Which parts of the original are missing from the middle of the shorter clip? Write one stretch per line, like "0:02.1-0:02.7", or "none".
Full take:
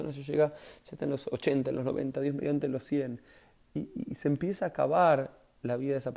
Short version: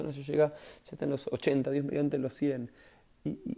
0:01.6-0:02.1